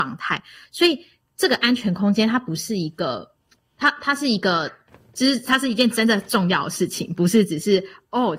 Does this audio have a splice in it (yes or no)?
no